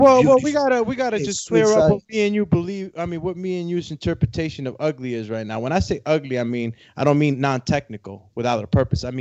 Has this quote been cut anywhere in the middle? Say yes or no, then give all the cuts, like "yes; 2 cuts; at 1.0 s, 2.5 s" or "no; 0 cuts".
no; 0 cuts